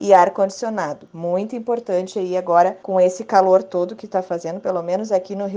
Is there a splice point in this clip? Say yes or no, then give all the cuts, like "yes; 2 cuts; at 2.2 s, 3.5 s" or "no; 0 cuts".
no; 0 cuts